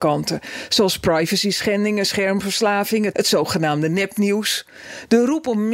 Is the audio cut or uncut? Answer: cut